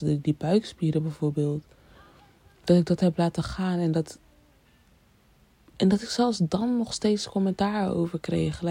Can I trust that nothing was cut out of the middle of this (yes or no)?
yes